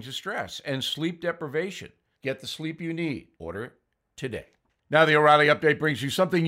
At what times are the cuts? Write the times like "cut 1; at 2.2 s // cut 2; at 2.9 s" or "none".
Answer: cut 1; at 2.1 s // cut 2; at 3.3 s

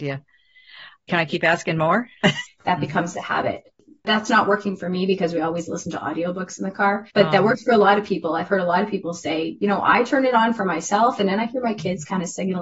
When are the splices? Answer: cut 1; at 2.5 s // cut 2; at 7.1 s

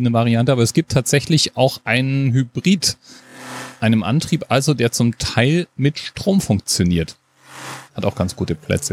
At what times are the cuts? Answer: cut 1; at 7.9 s

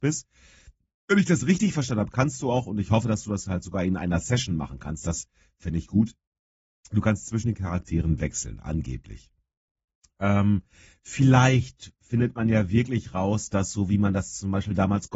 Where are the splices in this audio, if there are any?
none

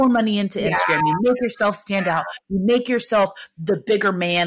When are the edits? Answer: none

